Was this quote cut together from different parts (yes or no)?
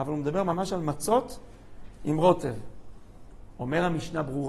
no